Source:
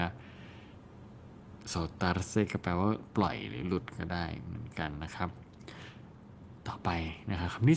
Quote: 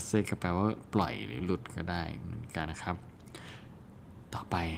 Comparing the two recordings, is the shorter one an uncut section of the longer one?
no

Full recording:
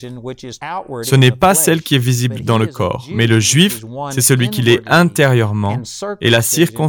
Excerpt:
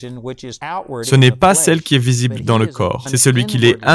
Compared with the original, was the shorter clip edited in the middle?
yes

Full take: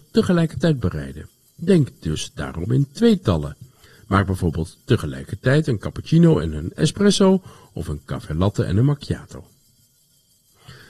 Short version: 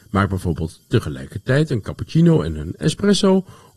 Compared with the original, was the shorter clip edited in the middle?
no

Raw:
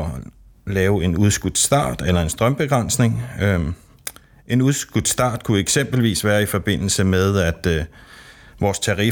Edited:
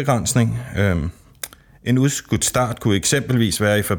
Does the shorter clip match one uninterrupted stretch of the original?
yes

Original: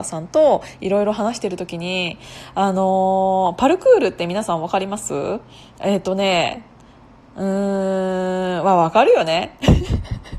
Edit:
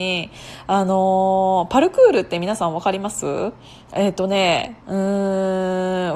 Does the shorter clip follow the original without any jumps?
no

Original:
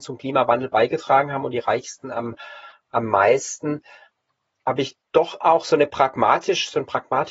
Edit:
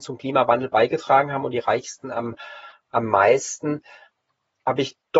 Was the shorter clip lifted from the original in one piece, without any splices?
yes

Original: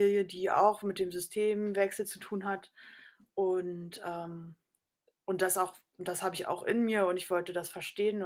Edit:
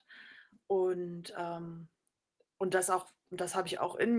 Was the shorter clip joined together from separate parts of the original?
no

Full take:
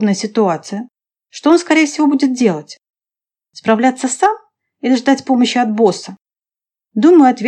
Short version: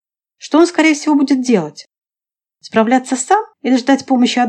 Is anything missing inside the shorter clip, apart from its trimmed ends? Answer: yes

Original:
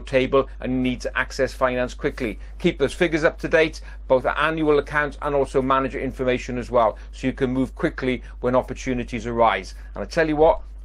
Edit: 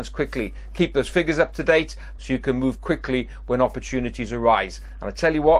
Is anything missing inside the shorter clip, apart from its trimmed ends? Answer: yes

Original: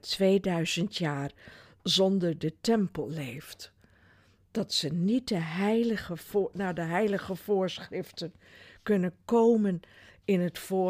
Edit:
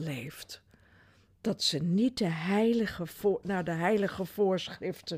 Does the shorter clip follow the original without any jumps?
yes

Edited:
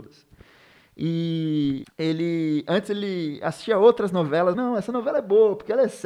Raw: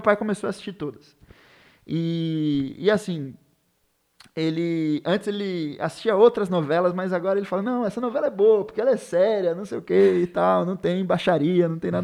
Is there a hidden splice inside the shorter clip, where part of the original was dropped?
yes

